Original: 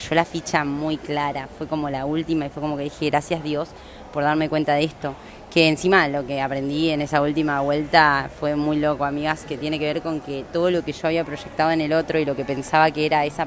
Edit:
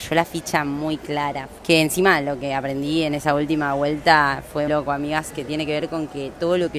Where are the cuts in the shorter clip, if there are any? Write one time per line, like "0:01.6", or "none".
0:01.6
0:04.7